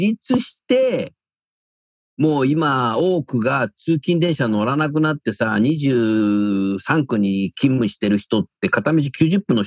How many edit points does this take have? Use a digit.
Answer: 0